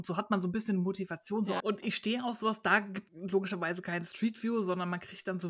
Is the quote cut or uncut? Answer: cut